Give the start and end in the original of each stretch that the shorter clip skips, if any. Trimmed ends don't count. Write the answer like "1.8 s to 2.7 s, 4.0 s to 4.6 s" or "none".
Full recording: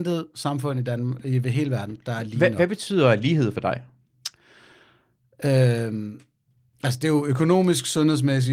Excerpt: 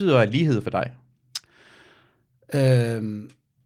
none